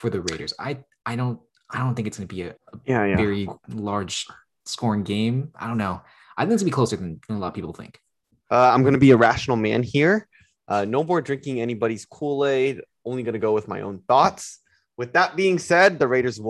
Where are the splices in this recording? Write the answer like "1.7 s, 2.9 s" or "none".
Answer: 2.6 s